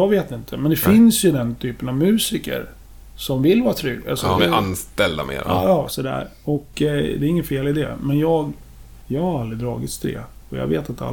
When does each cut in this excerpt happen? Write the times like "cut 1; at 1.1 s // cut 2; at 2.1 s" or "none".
cut 1; at 4.4 s